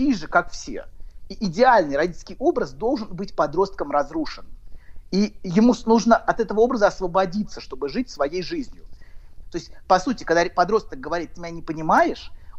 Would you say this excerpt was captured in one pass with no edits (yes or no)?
no